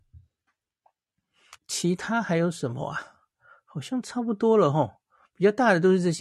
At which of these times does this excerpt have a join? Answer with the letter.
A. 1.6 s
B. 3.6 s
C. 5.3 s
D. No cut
A